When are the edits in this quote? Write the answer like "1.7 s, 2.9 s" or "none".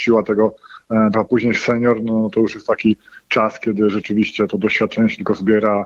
1.1 s